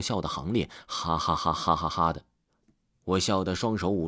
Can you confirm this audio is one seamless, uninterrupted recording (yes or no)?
yes